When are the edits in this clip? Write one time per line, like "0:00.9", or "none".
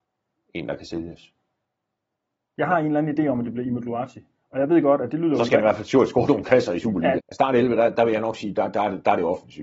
0:07.2